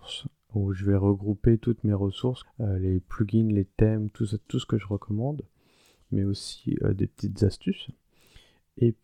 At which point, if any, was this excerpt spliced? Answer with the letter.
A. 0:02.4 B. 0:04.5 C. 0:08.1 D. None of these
A